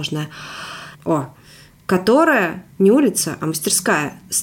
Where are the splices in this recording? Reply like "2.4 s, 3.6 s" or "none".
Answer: 0.9 s, 2.7 s